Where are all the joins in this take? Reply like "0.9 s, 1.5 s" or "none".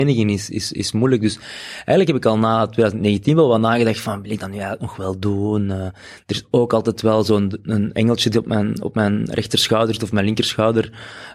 none